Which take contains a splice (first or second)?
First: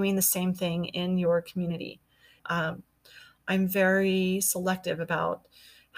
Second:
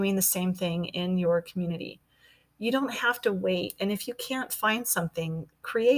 first